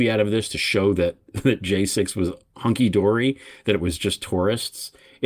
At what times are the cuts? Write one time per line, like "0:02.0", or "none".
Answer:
none